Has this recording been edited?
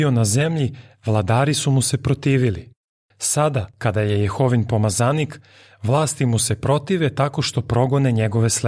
no; 0 cuts

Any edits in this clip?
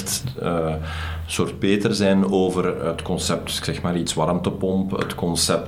no; 0 cuts

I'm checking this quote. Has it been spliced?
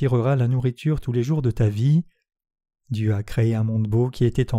yes; 1 cut; at 2.8 s

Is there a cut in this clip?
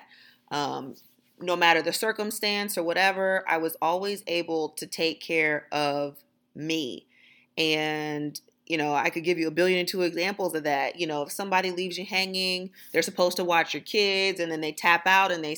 no; 0 cuts

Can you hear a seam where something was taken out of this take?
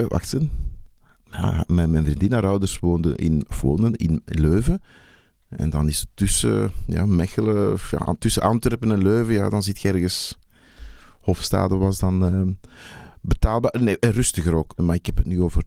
yes; 1 cut; at 14.8 s

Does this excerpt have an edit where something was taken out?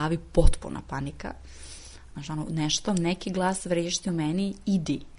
yes; 1 cut; at 2.1 s

